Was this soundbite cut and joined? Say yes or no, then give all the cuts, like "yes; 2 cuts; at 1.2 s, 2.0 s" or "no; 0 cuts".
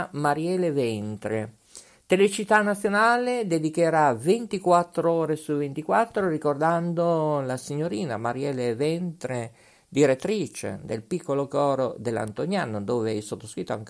no; 0 cuts